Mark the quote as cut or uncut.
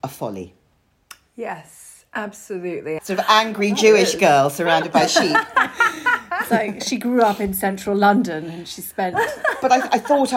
cut